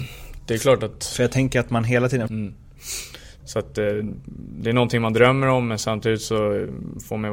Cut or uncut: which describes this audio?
cut